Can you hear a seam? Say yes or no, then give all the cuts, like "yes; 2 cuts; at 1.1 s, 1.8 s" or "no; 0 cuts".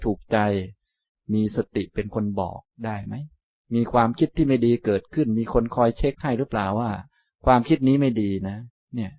no; 0 cuts